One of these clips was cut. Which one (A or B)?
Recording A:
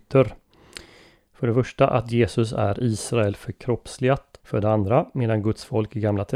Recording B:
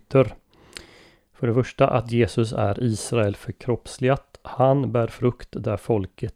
A